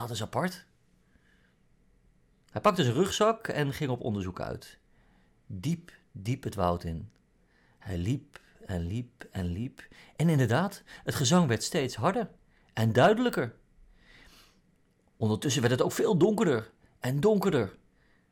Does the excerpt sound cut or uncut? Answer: uncut